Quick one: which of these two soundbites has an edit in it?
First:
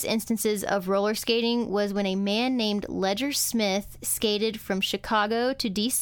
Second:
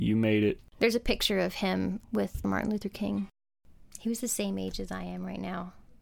second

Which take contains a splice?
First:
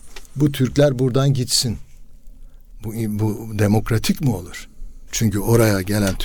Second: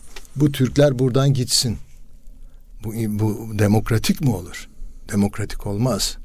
first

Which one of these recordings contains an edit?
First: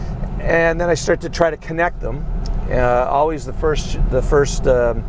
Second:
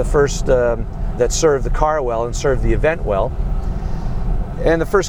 second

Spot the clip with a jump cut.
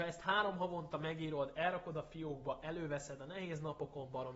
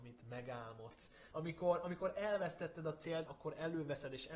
second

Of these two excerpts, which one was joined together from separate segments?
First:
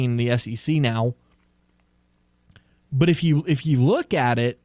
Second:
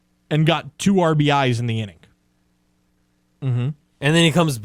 second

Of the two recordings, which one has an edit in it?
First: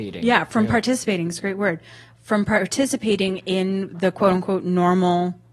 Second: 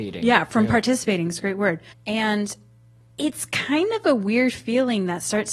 second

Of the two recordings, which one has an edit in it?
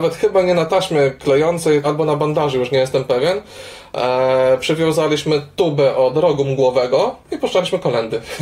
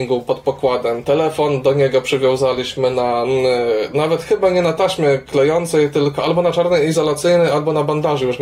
first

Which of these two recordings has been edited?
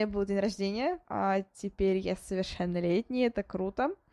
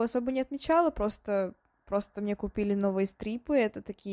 first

